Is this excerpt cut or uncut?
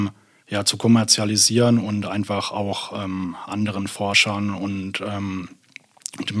uncut